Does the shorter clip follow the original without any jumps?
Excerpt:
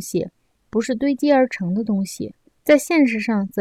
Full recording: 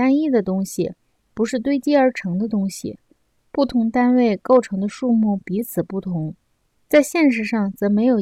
no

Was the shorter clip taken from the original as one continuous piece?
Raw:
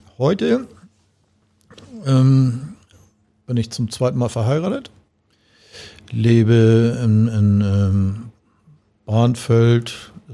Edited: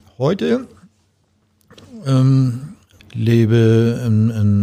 no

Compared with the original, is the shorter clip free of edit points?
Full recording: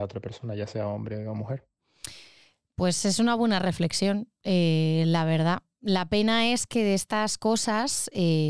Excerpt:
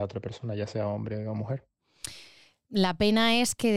no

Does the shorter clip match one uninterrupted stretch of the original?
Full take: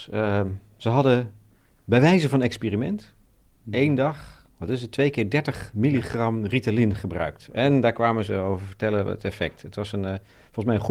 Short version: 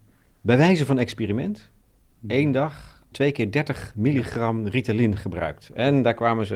no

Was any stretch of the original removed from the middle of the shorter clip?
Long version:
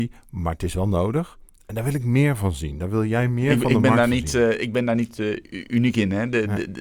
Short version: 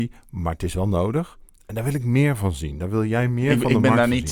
no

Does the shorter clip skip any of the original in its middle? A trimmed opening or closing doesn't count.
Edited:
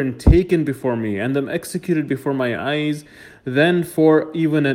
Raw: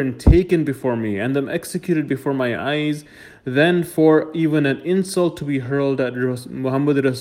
no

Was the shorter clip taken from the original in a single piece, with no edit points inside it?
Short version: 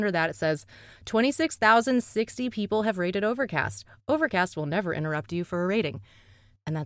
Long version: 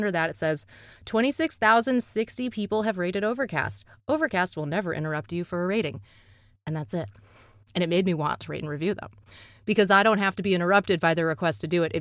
yes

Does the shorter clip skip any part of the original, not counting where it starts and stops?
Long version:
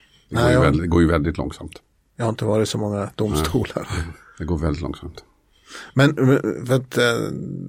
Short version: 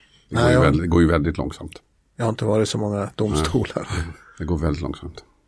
no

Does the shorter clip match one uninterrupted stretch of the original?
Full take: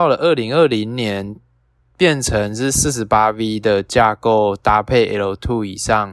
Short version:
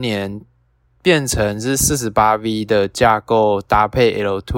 yes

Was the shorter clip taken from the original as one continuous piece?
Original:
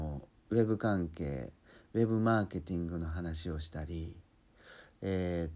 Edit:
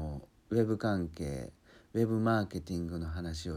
yes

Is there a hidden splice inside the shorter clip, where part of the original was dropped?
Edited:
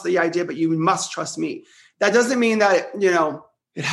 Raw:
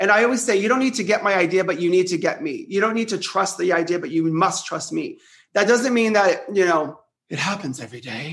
no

